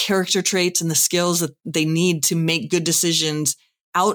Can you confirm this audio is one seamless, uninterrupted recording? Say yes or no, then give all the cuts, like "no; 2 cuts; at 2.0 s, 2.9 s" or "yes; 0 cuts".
yes; 0 cuts